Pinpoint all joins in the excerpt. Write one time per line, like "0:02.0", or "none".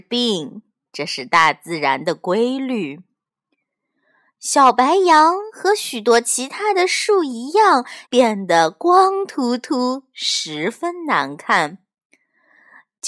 0:08.0